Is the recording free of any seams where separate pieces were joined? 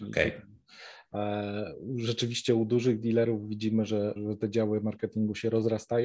no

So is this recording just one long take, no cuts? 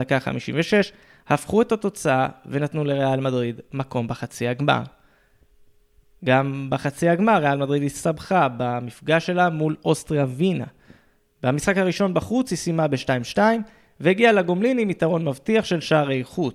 yes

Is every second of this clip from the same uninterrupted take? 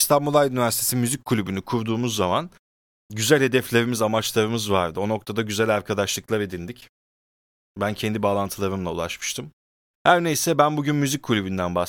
no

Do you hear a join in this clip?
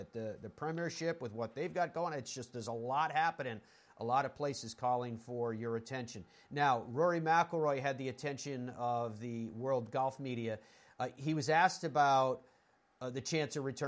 no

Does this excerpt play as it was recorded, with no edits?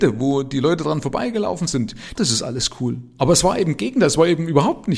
no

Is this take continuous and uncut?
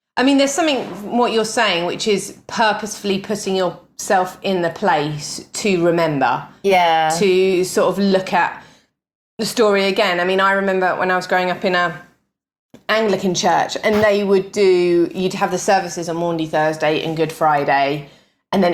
yes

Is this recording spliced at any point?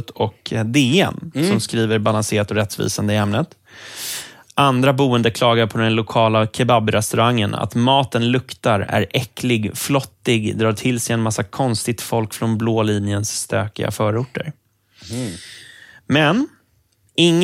yes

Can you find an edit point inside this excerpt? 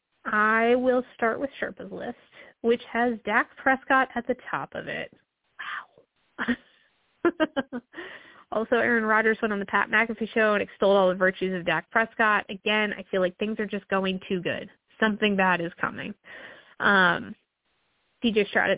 no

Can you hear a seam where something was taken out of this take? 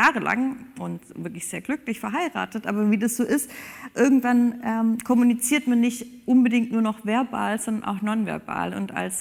no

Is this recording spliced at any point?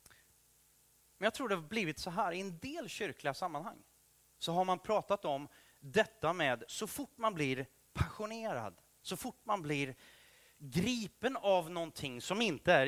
no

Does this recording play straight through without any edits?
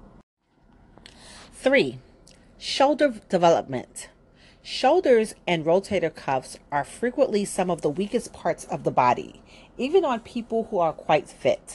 yes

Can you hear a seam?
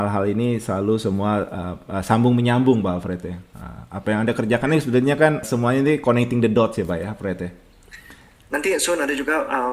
yes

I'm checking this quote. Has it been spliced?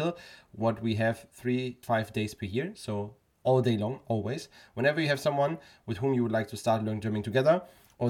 yes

